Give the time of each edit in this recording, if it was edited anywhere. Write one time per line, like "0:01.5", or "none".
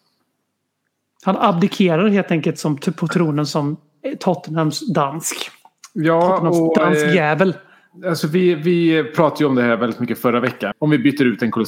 0:10.7